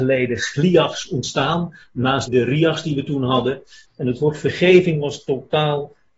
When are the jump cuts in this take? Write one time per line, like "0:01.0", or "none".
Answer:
0:02.3
0:03.8